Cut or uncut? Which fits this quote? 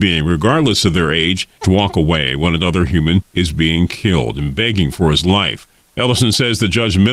cut